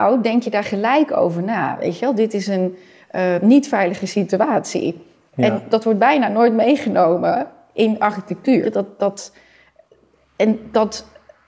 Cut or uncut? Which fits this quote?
cut